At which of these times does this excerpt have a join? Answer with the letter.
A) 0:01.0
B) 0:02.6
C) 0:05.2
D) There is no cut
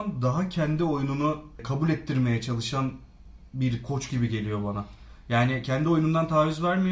D